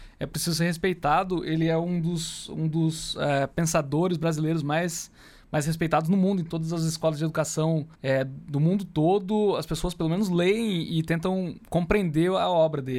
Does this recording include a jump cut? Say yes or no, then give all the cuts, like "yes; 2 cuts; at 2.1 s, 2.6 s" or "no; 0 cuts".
yes; 1 cut; at 7.9 s